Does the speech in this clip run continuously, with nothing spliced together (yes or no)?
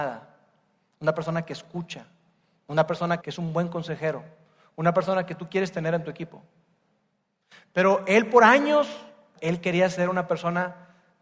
no